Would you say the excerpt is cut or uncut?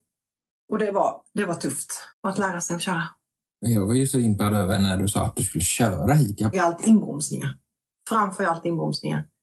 cut